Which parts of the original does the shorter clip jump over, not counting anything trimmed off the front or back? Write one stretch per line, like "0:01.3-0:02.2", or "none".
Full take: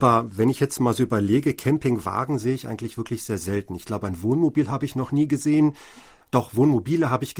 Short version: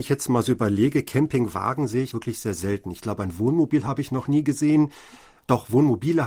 0:02.6-0:02.9

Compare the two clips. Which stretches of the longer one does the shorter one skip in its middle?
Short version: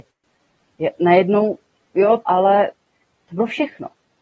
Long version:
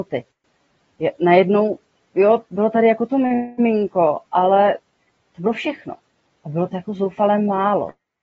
0:02.4-0:04.3

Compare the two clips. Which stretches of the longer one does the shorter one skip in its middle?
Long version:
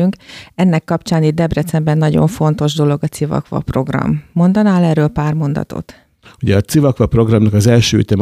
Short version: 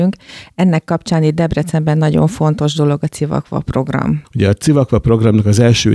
0:04.2-0:06.3

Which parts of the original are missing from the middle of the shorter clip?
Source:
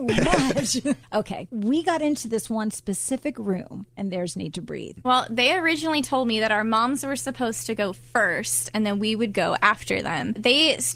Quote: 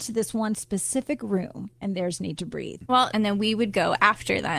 0:05.3-0:08.7

